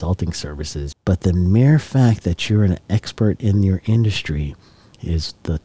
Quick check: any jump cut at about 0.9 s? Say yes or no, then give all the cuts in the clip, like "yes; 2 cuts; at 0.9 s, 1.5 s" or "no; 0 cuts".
yes; 1 cut; at 0.9 s